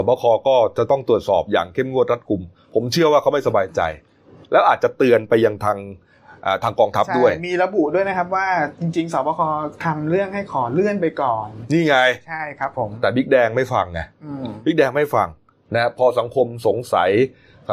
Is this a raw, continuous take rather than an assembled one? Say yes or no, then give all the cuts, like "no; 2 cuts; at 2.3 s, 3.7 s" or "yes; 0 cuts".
yes; 0 cuts